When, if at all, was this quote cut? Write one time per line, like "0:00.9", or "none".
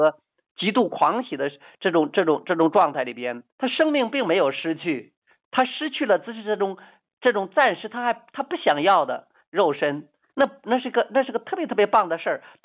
0:03.5
0:10.3